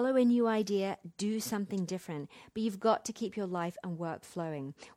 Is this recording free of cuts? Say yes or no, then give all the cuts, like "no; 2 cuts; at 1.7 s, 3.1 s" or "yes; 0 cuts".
yes; 0 cuts